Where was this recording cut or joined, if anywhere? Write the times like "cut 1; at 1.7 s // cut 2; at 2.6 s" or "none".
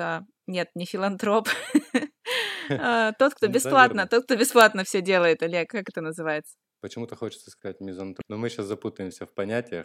cut 1; at 6.8 s // cut 2; at 8.2 s